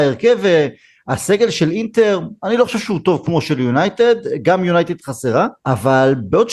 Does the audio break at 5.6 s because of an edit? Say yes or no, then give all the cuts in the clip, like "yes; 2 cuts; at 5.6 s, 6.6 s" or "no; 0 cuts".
yes; 1 cut; at 5.6 s